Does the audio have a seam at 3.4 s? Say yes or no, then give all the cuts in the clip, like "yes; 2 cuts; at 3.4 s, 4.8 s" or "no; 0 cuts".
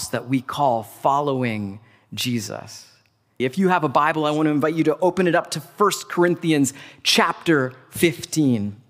yes; 1 cut; at 3.4 s